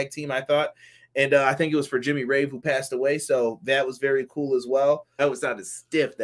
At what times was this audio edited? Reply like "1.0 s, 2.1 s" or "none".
5.2 s